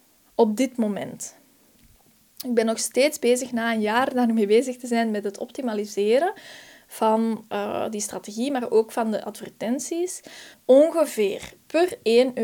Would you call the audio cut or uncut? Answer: cut